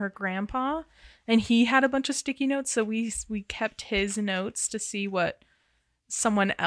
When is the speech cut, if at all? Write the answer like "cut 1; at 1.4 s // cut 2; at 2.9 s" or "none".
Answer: cut 1; at 4.7 s